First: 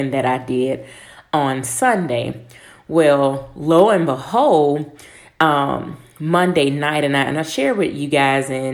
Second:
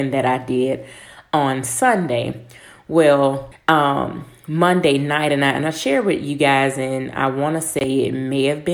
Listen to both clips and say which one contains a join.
second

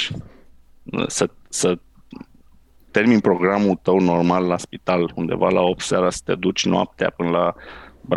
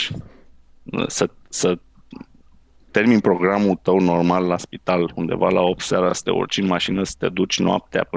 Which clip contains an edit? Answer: first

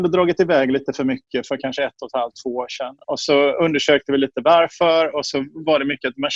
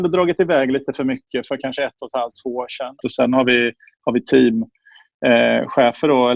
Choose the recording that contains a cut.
second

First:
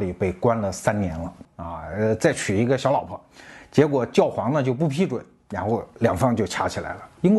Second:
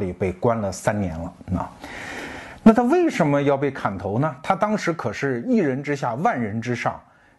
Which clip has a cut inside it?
first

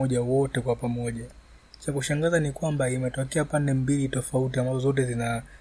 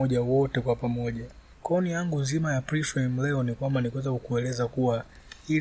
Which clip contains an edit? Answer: second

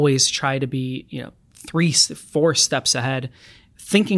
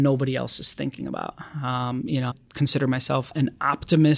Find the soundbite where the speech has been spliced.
second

